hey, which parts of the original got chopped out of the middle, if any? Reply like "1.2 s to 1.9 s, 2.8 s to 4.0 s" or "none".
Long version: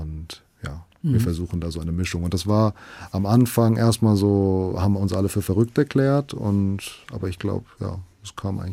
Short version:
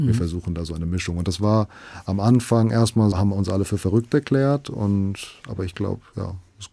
4.2 s to 4.8 s